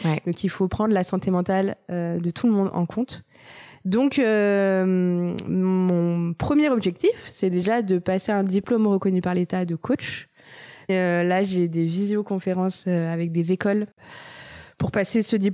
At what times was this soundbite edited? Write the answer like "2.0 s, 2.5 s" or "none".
10.9 s